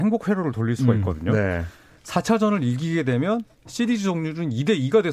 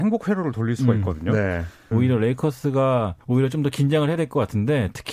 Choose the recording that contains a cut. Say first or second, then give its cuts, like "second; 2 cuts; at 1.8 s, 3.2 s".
second; 2 cuts; at 1.9 s, 3.2 s